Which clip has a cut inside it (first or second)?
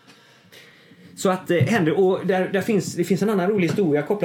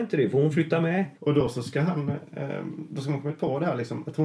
second